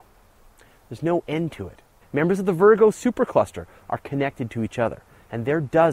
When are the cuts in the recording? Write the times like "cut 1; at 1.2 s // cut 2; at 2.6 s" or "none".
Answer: cut 1; at 2.0 s